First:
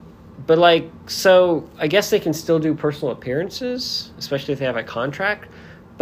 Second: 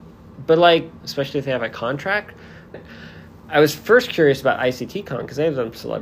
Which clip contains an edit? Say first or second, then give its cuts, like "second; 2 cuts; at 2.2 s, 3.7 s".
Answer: second; 2 cuts; at 1.0 s, 2.7 s